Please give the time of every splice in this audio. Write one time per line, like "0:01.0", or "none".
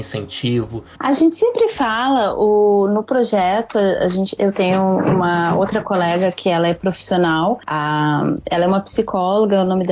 0:01.0